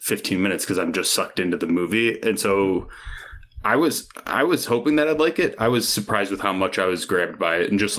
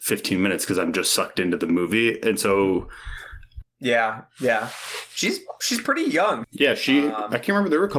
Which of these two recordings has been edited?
second; 2 cuts; at 3.6 s, 6.4 s

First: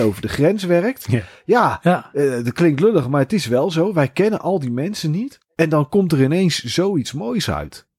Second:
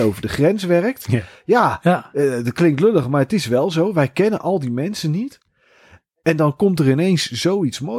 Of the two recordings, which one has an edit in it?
first; 1 cut; at 5.4 s

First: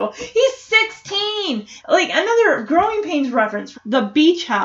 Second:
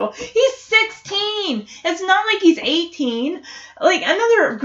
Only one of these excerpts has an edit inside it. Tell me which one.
first; 2 cuts; at 1.8 s, 3.7 s

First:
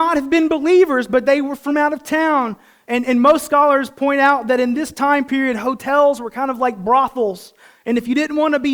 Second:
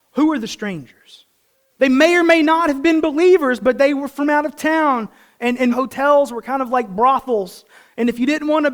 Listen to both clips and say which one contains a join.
second; 2 cuts; at 1.7 s, 5.7 s

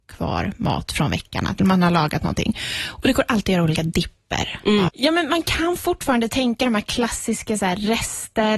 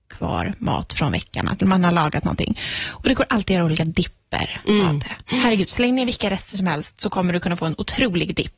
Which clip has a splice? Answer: first; 1 cut; at 4.9 s

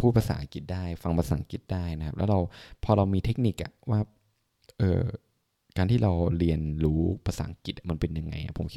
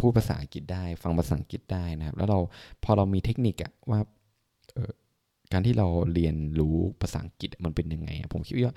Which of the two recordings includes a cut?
second; 1 cut; at 4.8 s

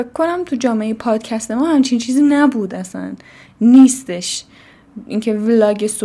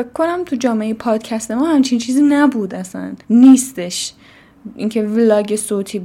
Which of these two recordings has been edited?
second; 1 cut; at 3.2 s

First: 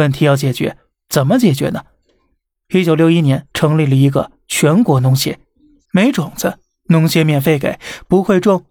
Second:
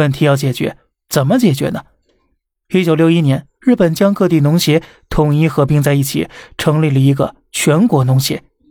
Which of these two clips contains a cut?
first; 2 cuts; at 3.5 s, 5.9 s

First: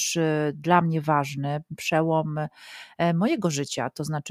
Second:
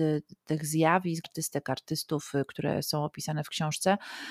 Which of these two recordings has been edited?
second; 1 cut; at 1.2 s

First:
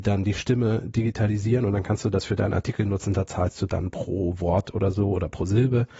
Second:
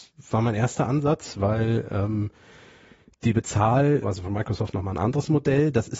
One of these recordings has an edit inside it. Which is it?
second; 1 cut; at 4.0 s

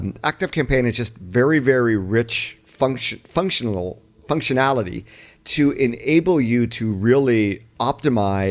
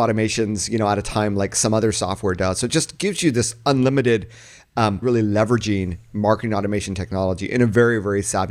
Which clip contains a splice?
second; 1 cut; at 5.0 s

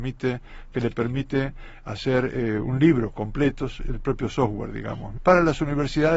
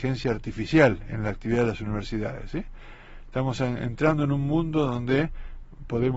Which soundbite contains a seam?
first; 1 cut; at 5.2 s

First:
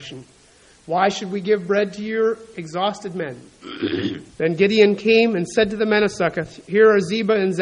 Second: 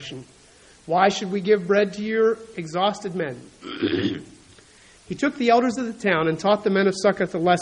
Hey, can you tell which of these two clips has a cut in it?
first; 1 cut; at 4.3 s

